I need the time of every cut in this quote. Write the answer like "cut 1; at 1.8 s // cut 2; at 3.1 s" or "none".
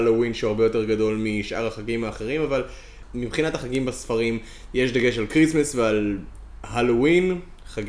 none